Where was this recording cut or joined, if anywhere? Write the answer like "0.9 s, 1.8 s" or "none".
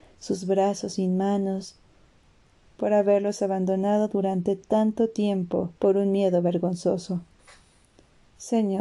2.6 s, 5.8 s